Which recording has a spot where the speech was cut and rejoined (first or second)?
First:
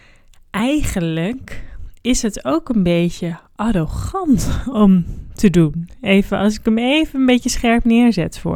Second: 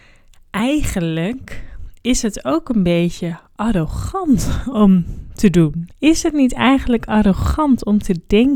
second